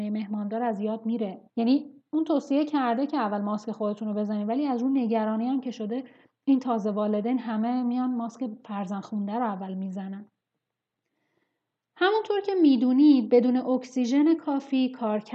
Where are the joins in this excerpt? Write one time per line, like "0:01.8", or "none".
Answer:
0:01.5